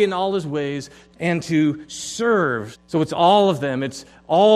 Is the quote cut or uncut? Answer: cut